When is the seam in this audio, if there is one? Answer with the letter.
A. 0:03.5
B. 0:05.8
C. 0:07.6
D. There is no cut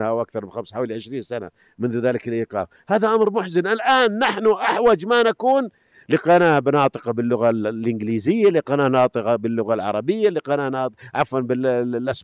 D